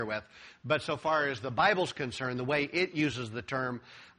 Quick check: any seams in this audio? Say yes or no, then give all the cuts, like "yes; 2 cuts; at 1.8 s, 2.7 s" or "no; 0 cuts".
no; 0 cuts